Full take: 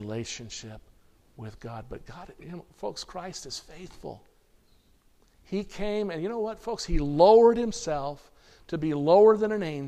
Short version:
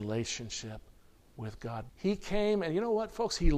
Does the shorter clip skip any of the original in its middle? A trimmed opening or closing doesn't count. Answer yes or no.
yes